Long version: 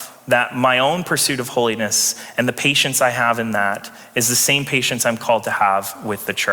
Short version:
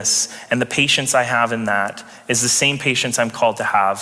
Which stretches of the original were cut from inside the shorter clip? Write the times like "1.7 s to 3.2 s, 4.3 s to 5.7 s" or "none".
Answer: none